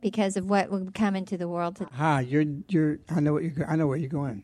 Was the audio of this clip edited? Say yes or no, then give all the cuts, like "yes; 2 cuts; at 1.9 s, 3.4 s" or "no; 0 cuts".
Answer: no; 0 cuts